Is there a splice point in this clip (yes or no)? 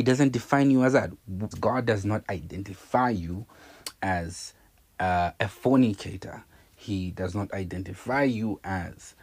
yes